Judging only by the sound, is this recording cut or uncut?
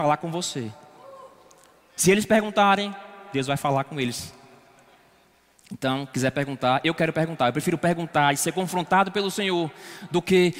uncut